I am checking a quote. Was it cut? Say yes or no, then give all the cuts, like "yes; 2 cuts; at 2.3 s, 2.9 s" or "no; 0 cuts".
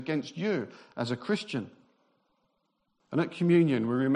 yes; 1 cut; at 3.0 s